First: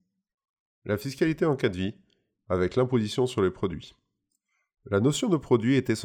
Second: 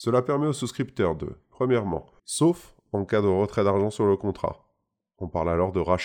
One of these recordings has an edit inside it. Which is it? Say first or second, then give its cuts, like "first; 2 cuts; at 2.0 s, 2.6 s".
second; 1 cut; at 2.2 s